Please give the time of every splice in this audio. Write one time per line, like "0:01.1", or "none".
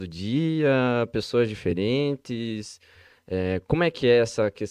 none